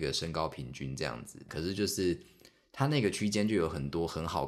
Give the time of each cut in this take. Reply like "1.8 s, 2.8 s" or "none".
1.5 s